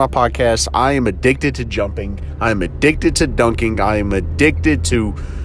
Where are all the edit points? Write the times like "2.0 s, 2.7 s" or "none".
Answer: none